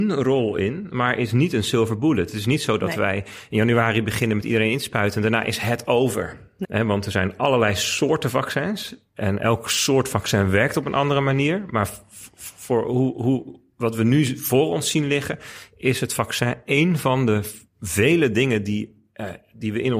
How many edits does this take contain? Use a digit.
1